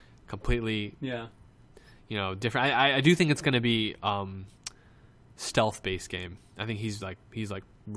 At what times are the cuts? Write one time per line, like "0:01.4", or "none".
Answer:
none